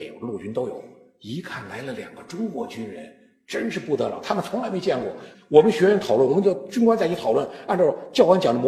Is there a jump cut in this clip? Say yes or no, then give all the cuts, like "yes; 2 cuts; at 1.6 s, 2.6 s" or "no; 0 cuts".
yes; 1 cut; at 5.3 s